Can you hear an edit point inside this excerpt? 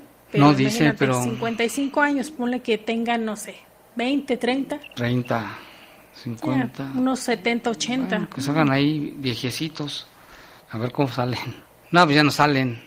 yes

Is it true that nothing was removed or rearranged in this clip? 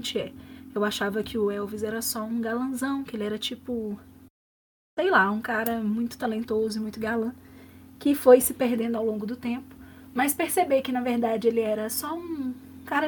yes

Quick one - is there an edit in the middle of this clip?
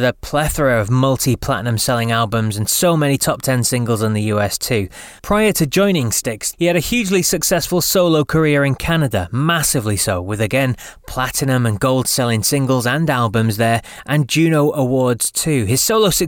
yes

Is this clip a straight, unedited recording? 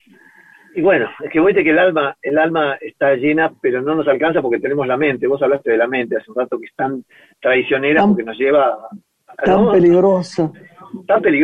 yes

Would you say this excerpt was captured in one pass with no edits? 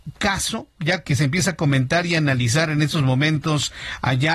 no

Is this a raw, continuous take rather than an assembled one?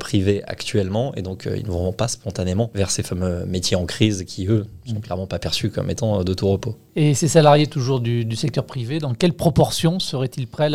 yes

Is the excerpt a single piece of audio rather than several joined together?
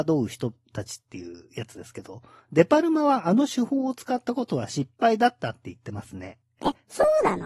yes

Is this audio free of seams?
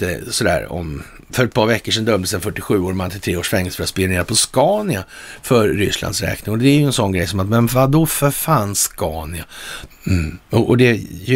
no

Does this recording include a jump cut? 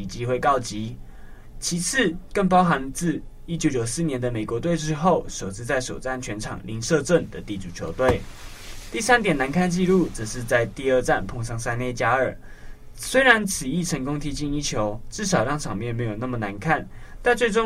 no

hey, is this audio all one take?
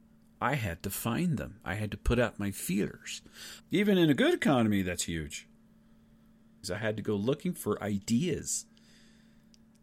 no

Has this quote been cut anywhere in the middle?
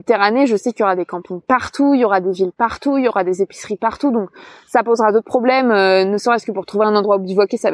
no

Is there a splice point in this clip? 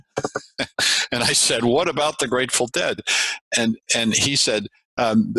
no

